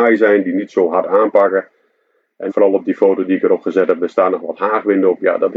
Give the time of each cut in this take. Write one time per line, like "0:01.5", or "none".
0:02.5